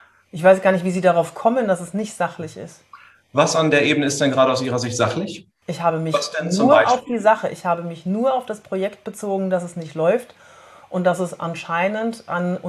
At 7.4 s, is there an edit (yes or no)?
no